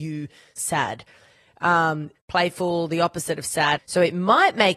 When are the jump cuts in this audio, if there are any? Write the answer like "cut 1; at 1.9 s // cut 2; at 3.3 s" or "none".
cut 1; at 2.2 s // cut 2; at 3.8 s